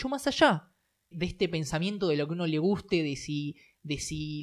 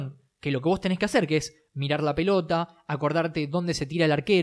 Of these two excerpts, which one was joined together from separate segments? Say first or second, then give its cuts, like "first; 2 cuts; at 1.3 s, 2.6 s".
first; 1 cut; at 1.1 s